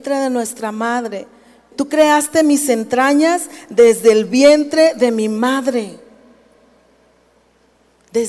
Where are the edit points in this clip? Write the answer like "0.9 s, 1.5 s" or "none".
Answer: 1.7 s